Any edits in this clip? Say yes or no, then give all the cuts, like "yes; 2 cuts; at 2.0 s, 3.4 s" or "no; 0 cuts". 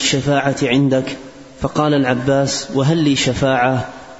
no; 0 cuts